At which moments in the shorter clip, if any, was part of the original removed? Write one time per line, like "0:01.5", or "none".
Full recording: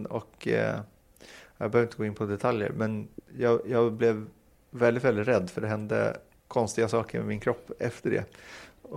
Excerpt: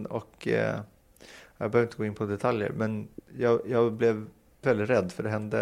0:04.6